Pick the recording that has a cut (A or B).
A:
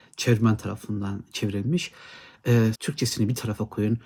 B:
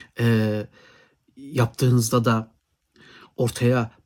A